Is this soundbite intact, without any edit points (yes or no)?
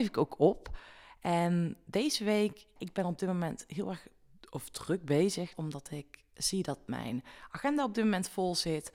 no